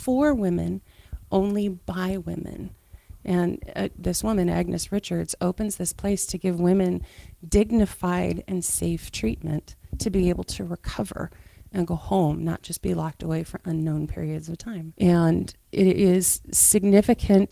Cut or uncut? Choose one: cut